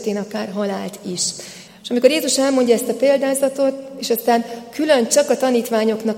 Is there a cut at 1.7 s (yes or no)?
yes